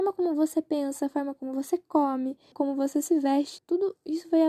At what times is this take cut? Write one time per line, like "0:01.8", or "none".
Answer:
0:02.5
0:03.6